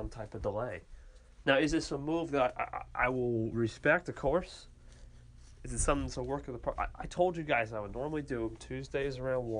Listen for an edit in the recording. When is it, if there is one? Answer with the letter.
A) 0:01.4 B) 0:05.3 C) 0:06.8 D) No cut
A